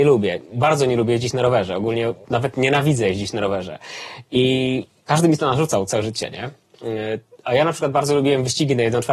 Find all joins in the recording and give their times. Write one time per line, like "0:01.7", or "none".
none